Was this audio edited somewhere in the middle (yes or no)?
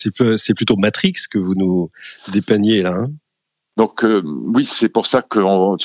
yes